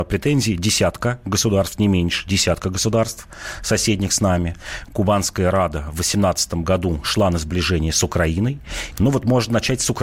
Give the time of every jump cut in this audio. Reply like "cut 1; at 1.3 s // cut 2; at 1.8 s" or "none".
cut 1; at 4.8 s // cut 2; at 8.9 s